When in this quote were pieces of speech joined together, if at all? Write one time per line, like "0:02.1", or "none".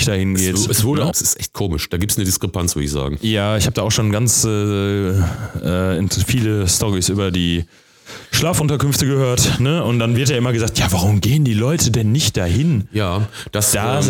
0:01.1